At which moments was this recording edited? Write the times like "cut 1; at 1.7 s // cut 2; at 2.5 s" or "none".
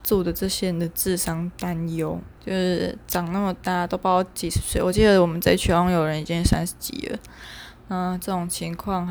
cut 1; at 2.4 s